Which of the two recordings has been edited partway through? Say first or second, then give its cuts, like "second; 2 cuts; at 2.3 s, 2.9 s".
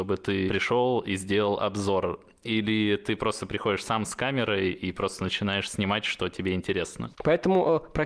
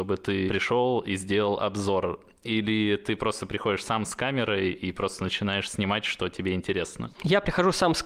first; 1 cut; at 7.1 s